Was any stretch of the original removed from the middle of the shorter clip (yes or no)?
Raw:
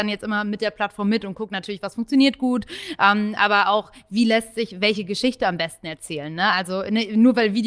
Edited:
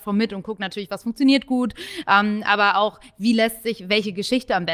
no